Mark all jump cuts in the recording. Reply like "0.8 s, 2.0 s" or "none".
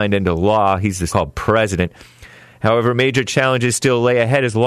1.1 s